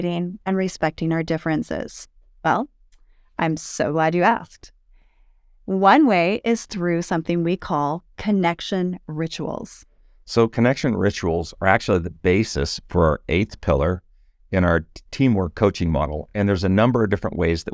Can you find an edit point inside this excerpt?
no; 0 cuts

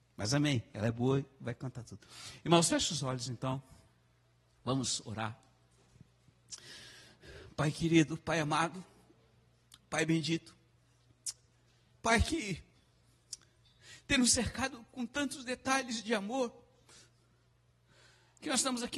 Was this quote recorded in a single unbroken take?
no; 1 cut; at 11.9 s

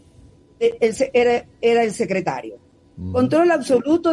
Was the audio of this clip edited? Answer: no; 0 cuts

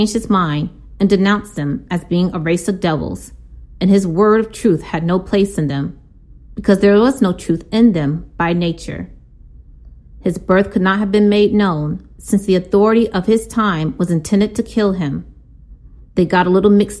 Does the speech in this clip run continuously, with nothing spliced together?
no; 1 cut; at 10.0 s

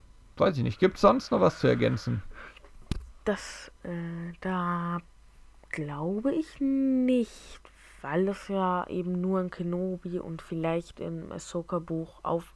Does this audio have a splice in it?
yes; 1 cut; at 3.8 s

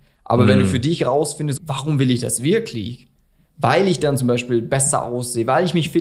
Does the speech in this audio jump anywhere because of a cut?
yes; 1 cut; at 1.6 s

